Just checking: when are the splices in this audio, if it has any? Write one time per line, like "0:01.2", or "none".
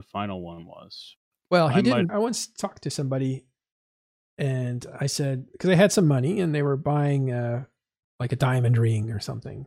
0:02.1
0:05.5